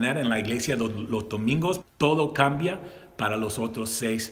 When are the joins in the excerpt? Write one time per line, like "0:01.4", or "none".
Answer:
0:01.8